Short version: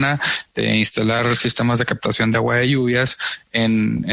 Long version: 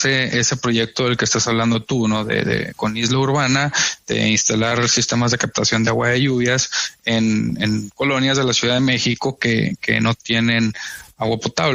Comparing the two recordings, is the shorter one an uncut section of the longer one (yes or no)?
yes